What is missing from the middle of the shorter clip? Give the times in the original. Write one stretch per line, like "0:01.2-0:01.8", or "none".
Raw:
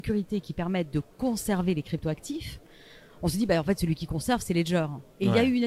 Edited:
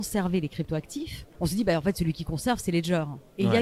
0:02.7-0:03.2